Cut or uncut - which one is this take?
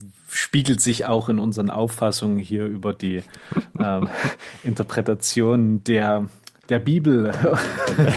uncut